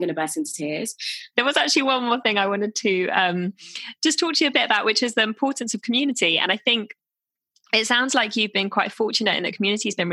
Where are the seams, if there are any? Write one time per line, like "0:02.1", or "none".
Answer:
0:01.3